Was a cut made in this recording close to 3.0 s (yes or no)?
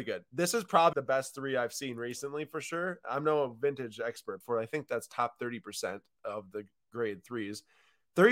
no